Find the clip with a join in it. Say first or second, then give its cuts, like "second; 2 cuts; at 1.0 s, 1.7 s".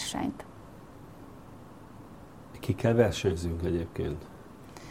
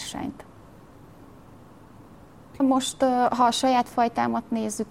second; 1 cut; at 2.6 s